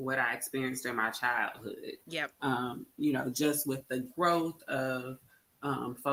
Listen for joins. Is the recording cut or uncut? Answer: uncut